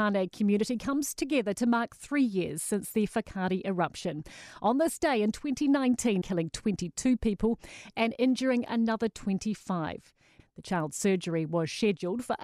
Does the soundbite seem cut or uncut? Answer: cut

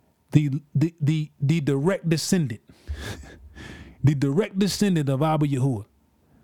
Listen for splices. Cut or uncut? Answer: uncut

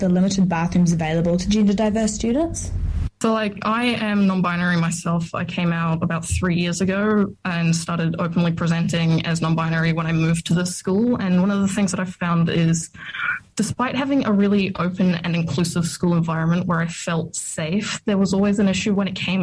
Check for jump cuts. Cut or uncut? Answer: uncut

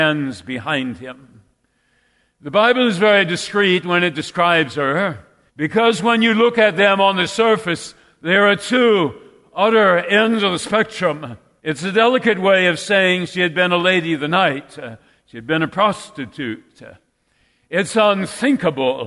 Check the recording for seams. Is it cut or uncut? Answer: cut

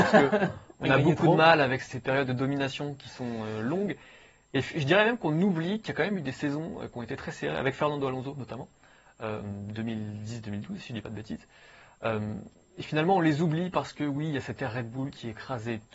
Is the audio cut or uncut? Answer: uncut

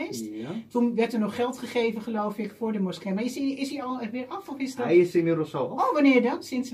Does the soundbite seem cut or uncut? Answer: uncut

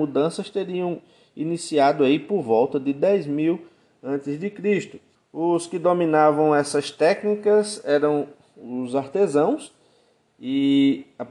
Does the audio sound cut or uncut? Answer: cut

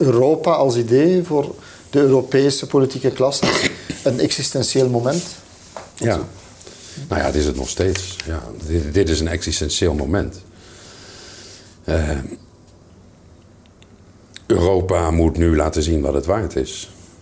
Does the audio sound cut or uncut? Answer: uncut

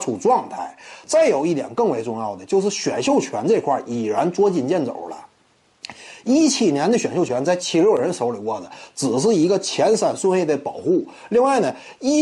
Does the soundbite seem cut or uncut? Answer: uncut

